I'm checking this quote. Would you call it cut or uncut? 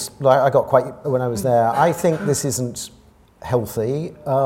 cut